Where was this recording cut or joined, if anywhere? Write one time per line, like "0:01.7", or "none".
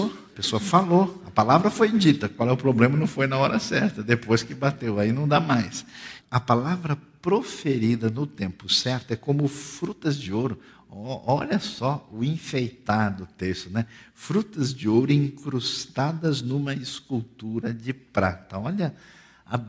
0:06.2